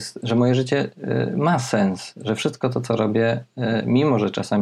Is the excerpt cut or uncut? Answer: uncut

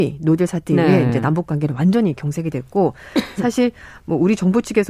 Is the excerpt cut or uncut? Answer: uncut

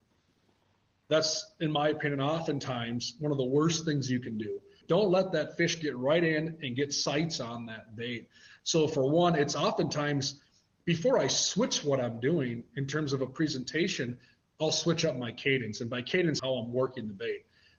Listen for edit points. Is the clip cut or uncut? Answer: cut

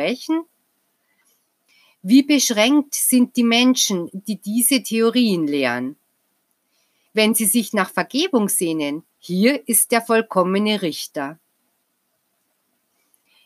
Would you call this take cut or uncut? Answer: cut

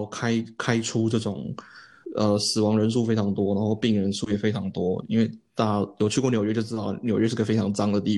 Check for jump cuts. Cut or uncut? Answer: cut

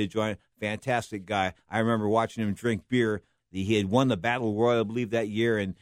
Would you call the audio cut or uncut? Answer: cut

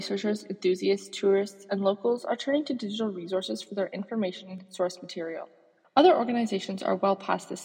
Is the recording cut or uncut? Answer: cut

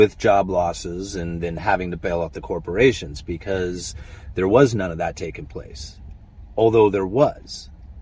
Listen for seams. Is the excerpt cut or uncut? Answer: uncut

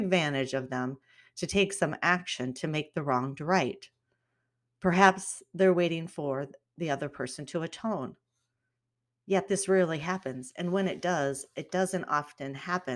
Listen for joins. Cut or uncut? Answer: uncut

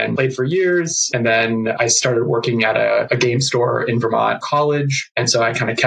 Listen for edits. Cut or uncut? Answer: uncut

